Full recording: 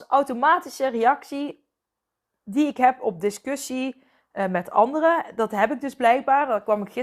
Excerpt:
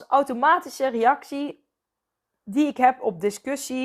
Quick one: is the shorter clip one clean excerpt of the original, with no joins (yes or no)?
yes